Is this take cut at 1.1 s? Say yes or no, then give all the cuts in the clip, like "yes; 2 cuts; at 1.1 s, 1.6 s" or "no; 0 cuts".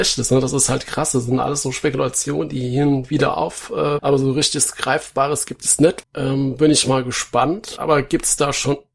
no; 3 cuts; at 4.0 s, 6.0 s, 7.8 s